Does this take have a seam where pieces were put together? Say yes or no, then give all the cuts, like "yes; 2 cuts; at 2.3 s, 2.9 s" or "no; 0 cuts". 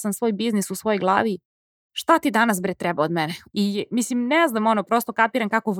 yes; 1 cut; at 3.5 s